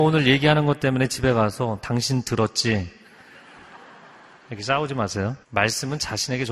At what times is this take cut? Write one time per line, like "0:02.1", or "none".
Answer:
0:05.4